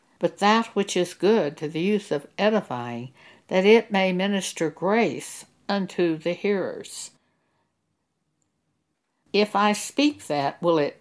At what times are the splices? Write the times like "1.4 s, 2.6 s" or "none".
none